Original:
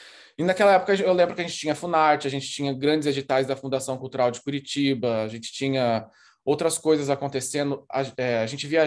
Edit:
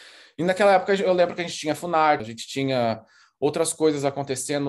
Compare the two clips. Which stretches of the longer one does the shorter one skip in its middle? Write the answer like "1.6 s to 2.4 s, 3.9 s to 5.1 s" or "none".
2.2 s to 5.2 s